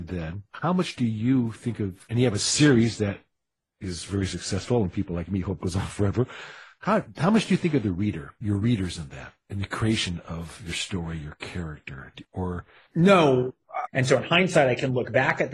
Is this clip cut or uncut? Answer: cut